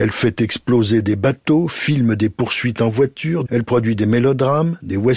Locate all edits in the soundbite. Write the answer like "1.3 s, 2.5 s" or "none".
3.5 s